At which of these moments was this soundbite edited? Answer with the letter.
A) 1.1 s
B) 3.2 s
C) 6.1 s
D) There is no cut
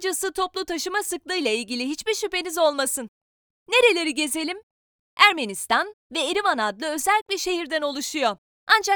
C